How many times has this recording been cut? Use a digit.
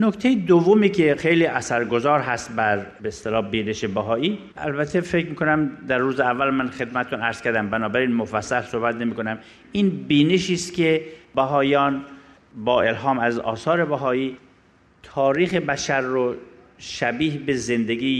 1